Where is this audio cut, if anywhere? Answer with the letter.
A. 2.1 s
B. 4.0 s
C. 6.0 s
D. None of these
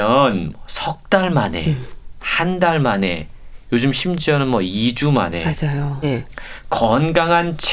C